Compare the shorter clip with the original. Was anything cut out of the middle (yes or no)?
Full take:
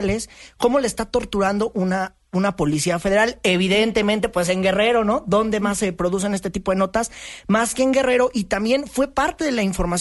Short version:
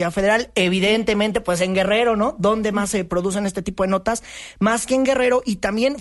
no